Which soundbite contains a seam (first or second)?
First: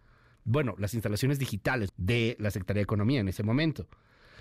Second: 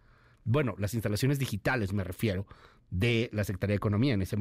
first